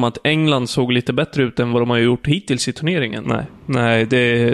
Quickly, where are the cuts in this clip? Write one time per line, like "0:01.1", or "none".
0:03.2